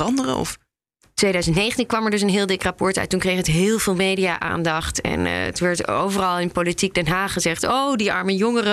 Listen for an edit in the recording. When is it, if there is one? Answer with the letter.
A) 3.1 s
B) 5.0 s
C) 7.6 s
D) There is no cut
D